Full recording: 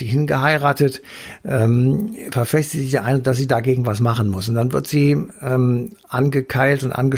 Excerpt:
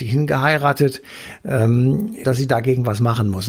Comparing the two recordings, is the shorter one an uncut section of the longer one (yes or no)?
no